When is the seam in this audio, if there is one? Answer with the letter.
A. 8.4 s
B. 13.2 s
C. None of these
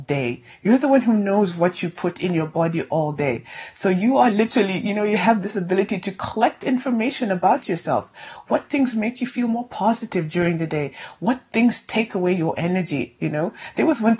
C